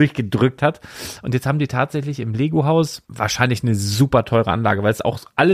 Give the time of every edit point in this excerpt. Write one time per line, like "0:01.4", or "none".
0:03.0